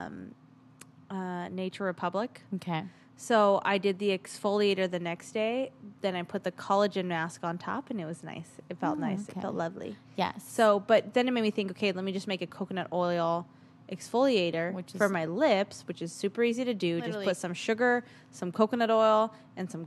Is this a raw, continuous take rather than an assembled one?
yes; 0 cuts

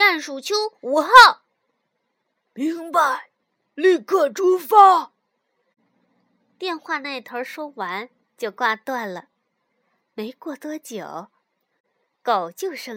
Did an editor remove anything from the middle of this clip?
no; 0 cuts

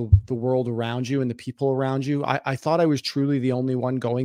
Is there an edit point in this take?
no; 0 cuts

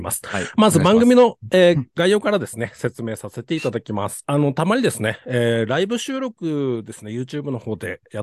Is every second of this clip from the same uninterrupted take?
no; 1 cut; at 4.2 s

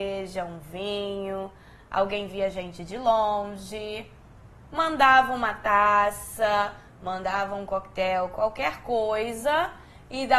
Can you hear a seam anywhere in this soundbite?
no; 0 cuts

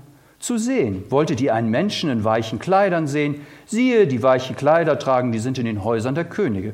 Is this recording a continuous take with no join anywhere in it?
yes; 0 cuts

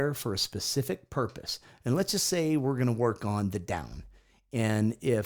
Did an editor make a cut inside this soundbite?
no; 0 cuts

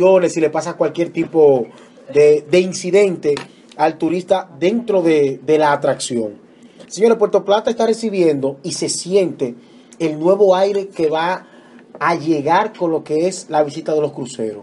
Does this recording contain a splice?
yes; 1 cut; at 6.9 s

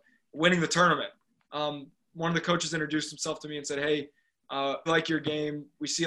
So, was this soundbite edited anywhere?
yes; 2 cuts; at 1.4 s, 4.9 s

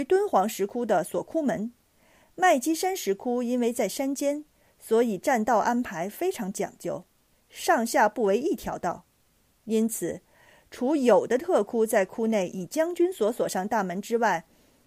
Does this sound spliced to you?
yes; 1 cut; at 7.3 s

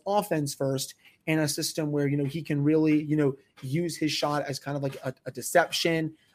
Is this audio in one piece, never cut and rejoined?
yes; 0 cuts

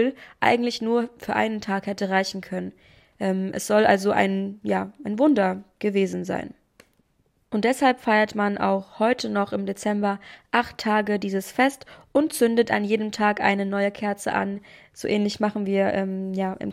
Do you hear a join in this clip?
no; 0 cuts

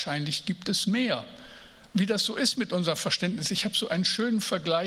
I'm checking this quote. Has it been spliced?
yes; 1 cut; at 1.9 s

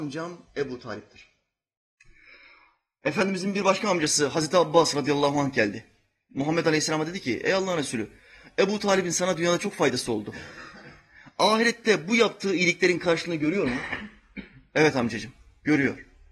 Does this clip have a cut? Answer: no; 0 cuts

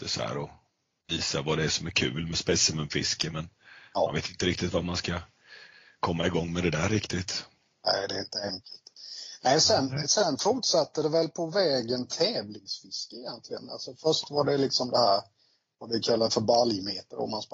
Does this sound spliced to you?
no; 0 cuts

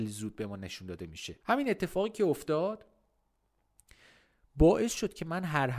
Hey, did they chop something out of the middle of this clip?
yes; 1 cut; at 1.4 s

